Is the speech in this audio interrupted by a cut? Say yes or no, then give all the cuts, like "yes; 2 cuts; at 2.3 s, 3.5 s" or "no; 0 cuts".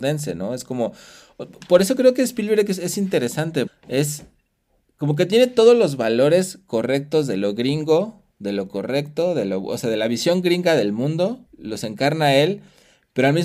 yes; 2 cuts; at 3.7 s, 11.5 s